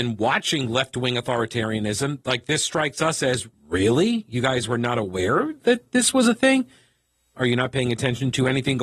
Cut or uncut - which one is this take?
cut